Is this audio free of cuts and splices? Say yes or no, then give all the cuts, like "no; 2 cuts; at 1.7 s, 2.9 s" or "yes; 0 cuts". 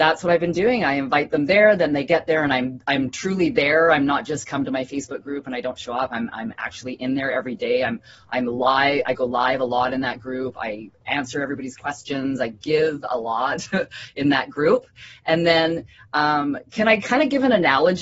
yes; 0 cuts